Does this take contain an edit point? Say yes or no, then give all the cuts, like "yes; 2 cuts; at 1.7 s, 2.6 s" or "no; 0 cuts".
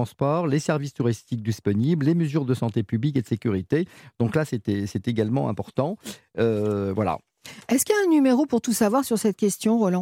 no; 0 cuts